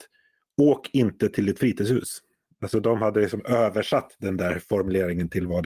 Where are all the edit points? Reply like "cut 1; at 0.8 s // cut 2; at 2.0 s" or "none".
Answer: cut 1; at 2.5 s